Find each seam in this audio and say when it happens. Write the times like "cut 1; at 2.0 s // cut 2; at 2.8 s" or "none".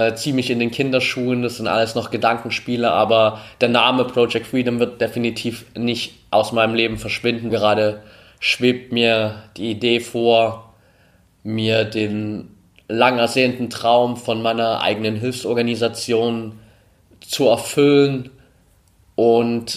cut 1; at 7.5 s